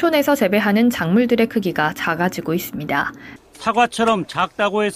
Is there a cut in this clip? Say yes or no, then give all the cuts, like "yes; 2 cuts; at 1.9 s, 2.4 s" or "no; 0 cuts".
yes; 1 cut; at 3.4 s